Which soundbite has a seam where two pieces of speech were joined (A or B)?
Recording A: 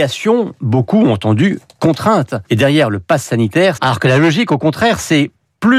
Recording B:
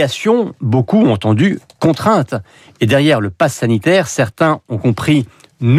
A